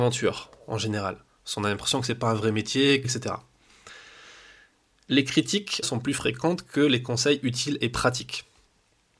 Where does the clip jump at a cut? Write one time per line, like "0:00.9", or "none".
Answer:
0:03.0
0:05.8

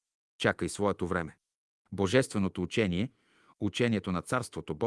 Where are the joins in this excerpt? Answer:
none

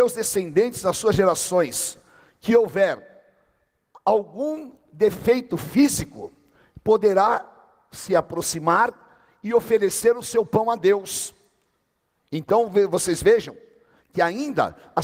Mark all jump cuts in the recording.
none

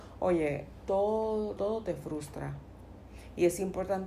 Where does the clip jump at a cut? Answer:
0:01.6

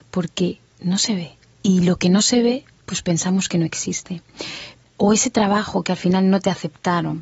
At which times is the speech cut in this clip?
0:04.8

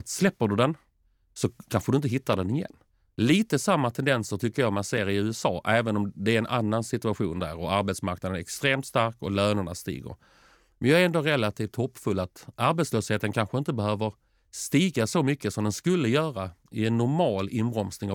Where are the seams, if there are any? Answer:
none

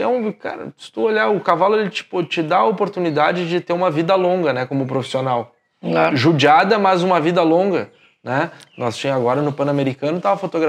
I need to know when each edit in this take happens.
none

